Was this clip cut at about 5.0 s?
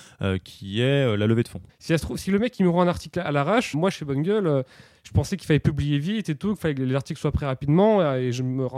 no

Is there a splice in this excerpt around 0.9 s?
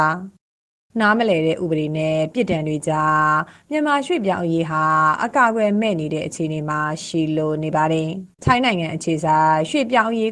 no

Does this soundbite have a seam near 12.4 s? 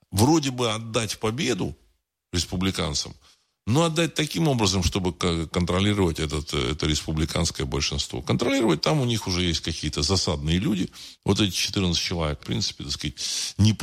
yes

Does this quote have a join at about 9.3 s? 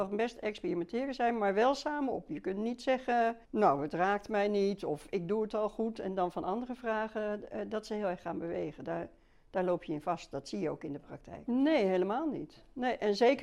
no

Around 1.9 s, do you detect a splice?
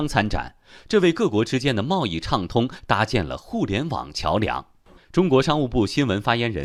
no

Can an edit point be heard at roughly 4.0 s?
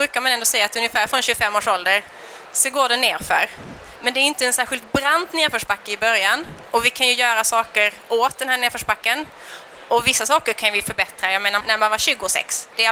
no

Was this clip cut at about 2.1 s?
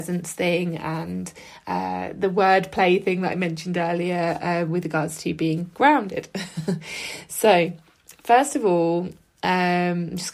no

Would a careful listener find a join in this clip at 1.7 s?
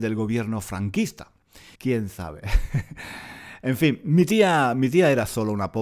yes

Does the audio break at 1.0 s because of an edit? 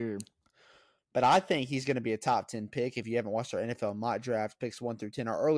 yes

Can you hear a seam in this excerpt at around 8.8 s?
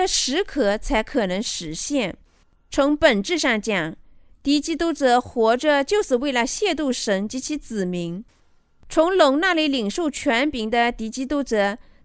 no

